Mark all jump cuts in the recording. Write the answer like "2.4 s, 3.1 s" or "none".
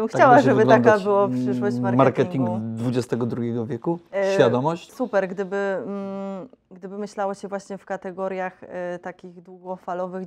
4.9 s